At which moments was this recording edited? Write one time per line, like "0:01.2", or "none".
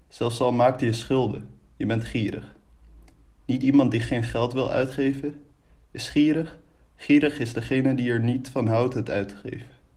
none